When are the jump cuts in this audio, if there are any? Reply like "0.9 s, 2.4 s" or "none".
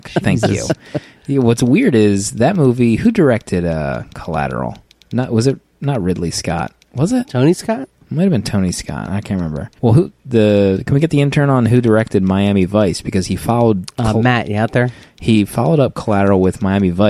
9.8 s